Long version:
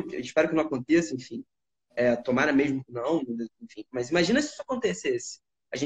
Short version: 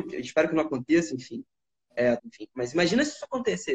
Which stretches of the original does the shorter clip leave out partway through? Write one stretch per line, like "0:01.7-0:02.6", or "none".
0:02.2-0:03.5